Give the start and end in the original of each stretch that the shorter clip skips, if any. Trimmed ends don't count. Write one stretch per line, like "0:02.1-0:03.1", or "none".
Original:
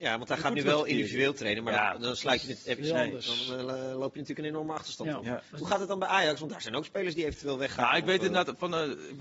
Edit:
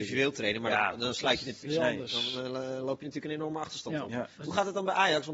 0:02.6-0:02.8